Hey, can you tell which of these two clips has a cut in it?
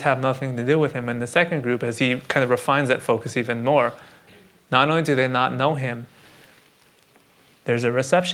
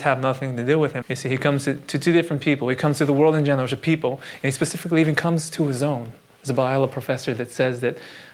second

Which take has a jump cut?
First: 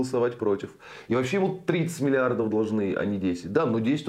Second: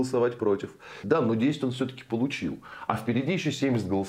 second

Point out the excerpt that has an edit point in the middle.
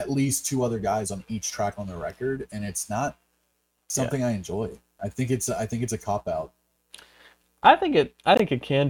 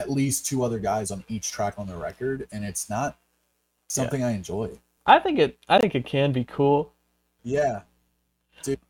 second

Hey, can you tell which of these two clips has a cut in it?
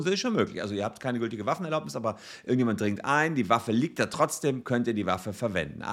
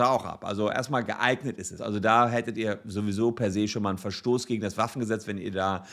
second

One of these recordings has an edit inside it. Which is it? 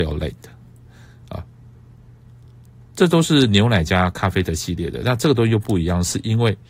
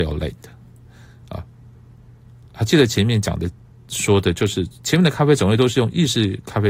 second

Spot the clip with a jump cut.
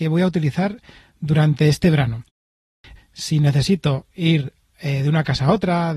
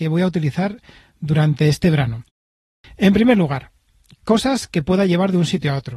first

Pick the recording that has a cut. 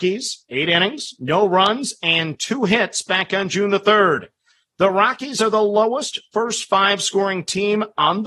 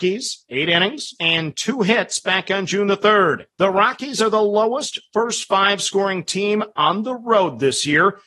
second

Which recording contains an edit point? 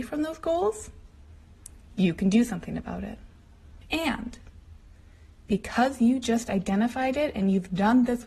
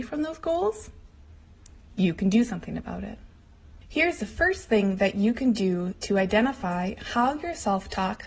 first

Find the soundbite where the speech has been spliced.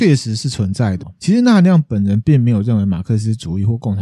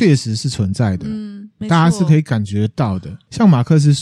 first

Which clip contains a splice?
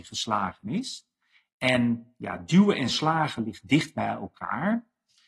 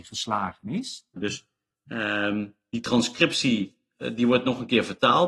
second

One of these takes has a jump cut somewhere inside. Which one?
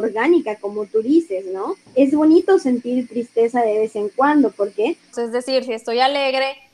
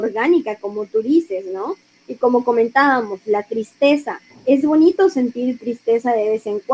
first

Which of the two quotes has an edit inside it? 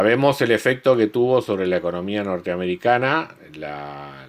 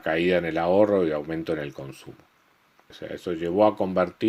second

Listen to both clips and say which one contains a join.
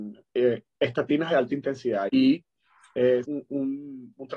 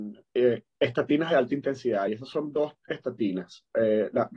first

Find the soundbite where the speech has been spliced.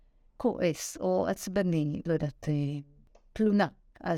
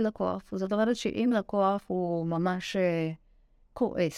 first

